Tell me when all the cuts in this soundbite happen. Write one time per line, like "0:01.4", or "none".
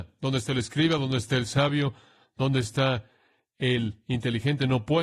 none